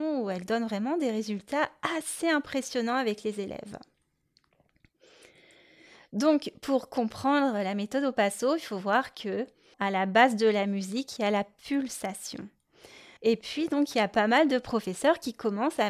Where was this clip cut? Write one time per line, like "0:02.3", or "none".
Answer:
0:09.7
0:11.2
0:13.2